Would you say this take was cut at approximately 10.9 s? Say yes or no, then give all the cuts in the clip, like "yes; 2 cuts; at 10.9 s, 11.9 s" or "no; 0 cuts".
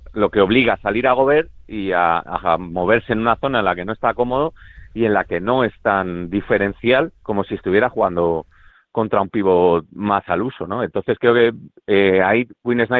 no; 1 cut; at 7.2 s